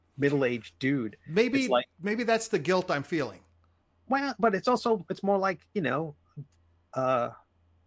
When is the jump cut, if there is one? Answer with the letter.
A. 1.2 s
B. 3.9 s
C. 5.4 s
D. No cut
D